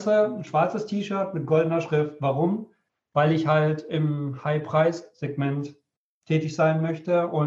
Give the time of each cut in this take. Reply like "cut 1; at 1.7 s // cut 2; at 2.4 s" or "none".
none